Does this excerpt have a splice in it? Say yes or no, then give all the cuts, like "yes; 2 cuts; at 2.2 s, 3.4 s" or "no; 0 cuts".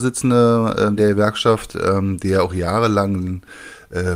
no; 0 cuts